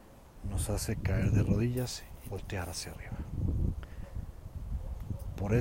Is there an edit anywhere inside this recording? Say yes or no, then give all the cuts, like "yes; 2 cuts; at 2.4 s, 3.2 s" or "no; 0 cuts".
yes; 1 cut; at 2.3 s